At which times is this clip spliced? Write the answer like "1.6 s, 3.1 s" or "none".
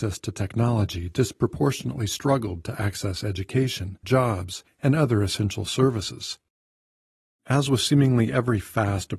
4.0 s, 7.4 s